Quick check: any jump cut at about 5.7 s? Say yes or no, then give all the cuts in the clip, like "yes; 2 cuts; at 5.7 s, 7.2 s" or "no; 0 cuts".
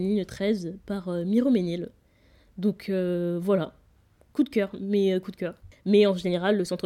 yes; 1 cut; at 5.7 s